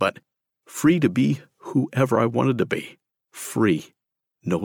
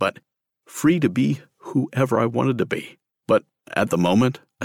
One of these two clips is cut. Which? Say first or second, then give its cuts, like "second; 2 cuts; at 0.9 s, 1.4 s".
second; 1 cut; at 3.1 s